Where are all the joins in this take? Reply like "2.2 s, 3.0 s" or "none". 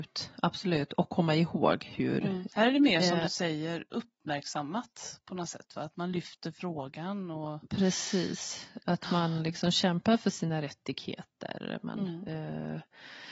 2.5 s